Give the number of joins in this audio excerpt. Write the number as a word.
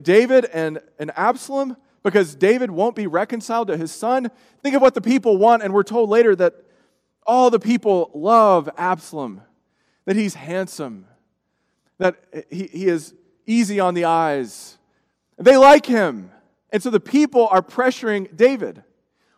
one